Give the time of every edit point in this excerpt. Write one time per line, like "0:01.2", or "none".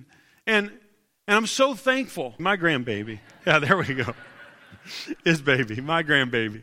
0:02.4

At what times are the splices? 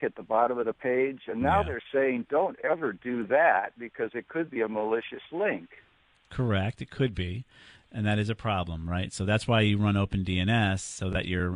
none

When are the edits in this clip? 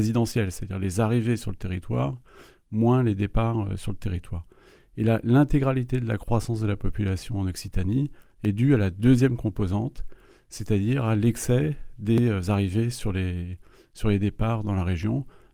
none

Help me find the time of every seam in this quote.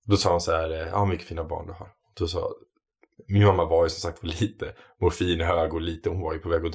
none

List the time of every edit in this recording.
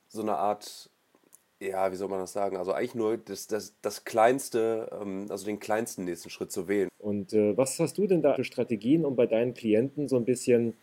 0:06.9
0:08.4

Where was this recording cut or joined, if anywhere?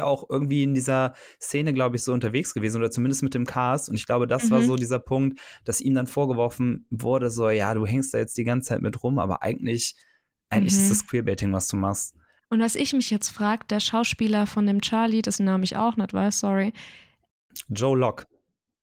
0:12.4

